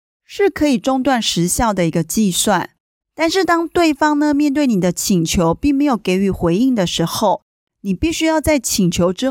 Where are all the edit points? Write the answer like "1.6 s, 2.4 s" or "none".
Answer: none